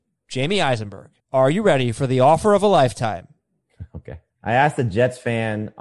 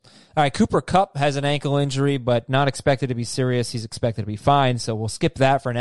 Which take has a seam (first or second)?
first